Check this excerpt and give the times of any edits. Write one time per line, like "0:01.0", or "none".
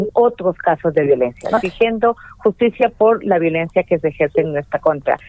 0:01.6